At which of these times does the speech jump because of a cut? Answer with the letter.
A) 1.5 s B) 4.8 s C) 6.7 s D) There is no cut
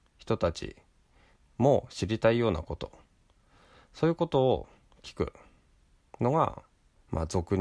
D